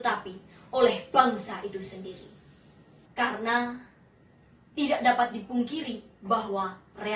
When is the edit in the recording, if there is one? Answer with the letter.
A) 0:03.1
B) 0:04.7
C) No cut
A